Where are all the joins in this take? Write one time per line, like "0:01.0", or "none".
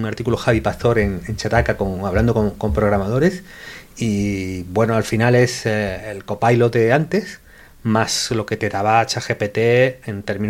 none